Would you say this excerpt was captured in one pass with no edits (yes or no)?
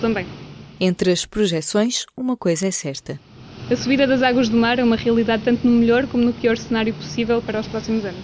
yes